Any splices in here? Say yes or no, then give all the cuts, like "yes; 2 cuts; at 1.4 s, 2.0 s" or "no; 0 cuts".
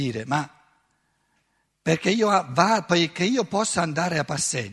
no; 0 cuts